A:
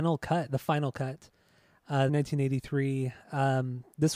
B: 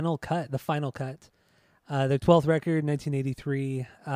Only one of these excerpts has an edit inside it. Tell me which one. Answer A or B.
A